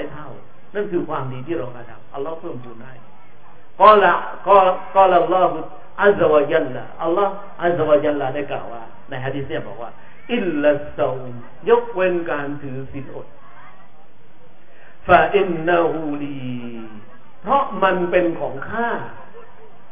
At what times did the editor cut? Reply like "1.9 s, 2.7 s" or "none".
none